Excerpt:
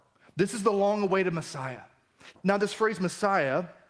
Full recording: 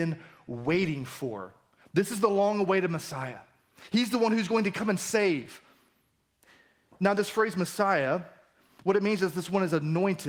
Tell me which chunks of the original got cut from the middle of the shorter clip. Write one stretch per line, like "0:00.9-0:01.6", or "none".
0:03.9-0:06.9